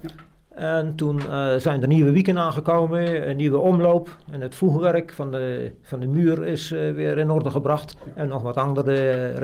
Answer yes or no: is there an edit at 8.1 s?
no